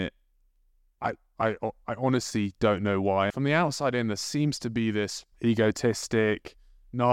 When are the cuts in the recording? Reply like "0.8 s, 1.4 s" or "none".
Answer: 3.3 s, 5.3 s